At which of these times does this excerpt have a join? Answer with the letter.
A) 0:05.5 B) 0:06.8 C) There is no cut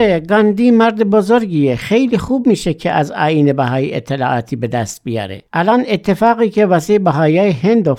A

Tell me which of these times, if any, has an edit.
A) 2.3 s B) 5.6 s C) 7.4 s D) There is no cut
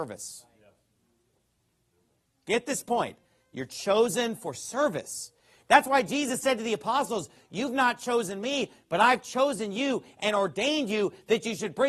D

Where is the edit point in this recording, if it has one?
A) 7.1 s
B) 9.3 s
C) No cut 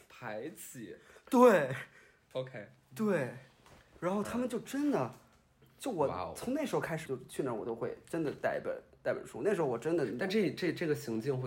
A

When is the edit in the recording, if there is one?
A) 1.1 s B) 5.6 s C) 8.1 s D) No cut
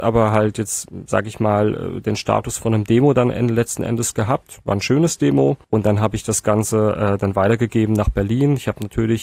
B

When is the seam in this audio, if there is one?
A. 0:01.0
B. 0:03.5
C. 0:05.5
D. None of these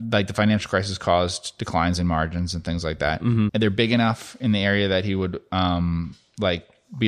B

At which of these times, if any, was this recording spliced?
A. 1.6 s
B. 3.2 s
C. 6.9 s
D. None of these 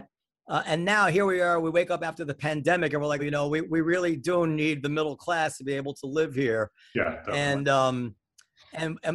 B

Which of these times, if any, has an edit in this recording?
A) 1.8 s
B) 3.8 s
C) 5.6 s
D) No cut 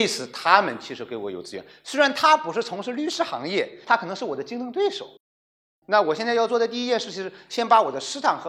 B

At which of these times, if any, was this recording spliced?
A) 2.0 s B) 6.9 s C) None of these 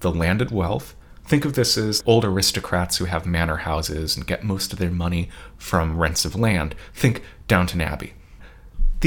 A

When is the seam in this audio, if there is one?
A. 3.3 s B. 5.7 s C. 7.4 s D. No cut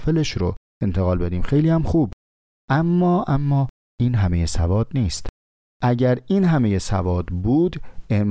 A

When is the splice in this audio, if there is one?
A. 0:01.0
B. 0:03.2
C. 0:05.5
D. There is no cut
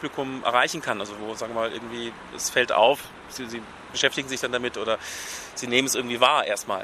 D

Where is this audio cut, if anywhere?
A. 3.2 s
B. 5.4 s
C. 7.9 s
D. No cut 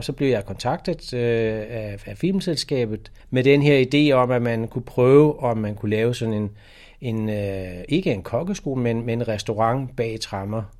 A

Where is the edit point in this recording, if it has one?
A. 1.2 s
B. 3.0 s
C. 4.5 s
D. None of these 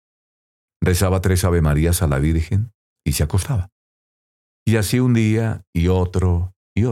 B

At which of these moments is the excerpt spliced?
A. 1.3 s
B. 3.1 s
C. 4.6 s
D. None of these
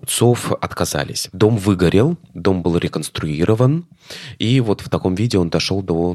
A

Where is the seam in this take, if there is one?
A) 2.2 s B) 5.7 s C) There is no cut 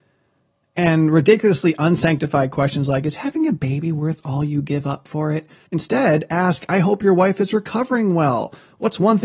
B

